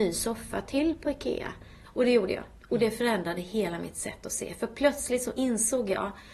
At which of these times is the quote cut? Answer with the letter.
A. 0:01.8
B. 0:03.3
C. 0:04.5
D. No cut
A